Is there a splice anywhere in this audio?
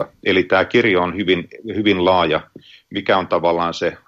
no; 0 cuts

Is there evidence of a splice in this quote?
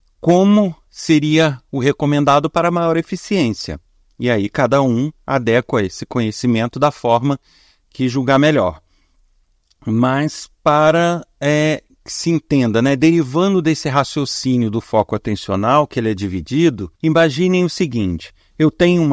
yes; 1 cut; at 16.9 s

